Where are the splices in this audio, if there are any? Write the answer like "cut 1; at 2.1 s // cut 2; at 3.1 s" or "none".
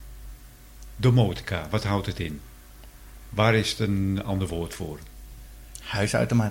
none